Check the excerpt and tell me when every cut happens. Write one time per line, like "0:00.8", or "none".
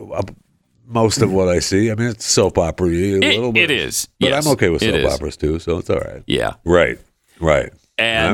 0:06.6